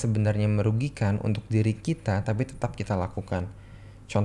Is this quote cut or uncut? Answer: uncut